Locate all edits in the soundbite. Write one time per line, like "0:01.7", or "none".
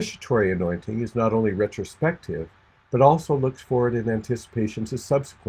none